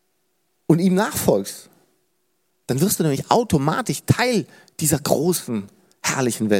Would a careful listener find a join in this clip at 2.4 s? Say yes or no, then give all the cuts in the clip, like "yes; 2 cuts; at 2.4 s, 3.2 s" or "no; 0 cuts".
no; 0 cuts